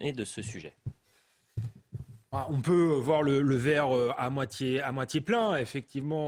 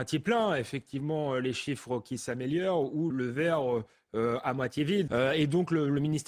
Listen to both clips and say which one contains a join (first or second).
second